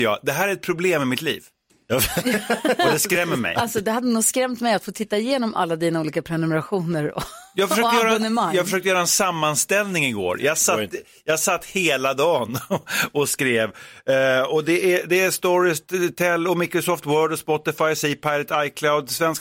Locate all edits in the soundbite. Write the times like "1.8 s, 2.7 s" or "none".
none